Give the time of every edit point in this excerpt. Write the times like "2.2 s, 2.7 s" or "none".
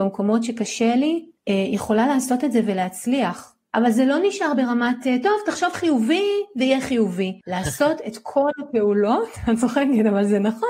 1.4 s